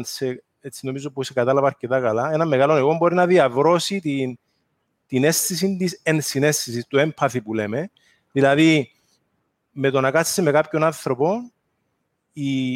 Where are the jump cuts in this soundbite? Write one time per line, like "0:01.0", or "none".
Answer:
none